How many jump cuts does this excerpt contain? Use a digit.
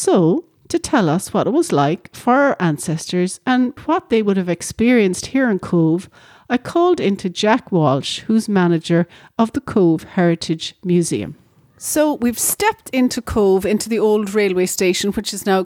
1